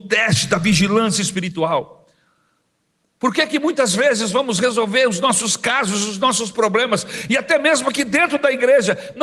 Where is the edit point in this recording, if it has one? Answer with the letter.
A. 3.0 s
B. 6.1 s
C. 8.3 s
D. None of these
D